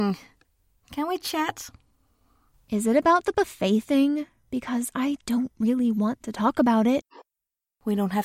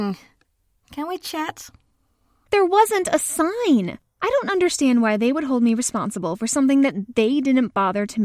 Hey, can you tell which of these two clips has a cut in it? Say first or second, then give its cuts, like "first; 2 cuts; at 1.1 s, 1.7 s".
second; 1 cut; at 2.5 s